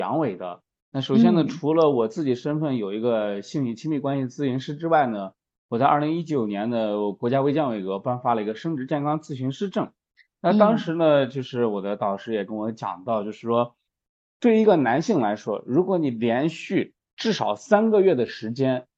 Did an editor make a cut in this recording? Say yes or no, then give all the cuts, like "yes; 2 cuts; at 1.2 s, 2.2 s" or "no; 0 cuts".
no; 0 cuts